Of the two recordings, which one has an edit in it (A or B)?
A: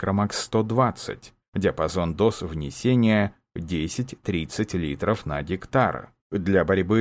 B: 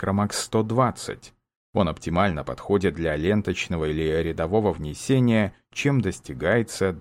A